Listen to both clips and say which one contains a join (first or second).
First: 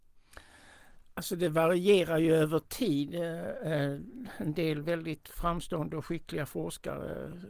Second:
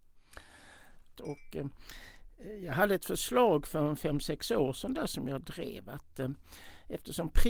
second